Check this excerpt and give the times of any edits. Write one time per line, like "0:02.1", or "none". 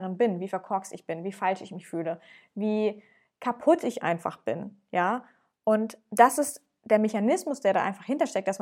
none